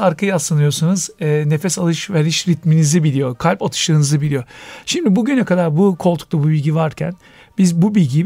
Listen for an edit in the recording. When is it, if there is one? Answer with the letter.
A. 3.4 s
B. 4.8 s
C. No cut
C